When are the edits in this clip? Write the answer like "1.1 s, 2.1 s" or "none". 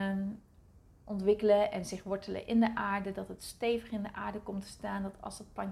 none